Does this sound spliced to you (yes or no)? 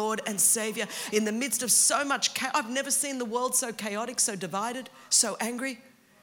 yes